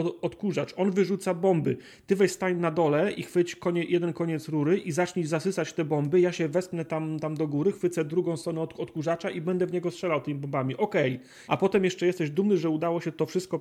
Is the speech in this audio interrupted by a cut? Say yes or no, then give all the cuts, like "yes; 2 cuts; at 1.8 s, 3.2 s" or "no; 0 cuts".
yes; 1 cut; at 11.5 s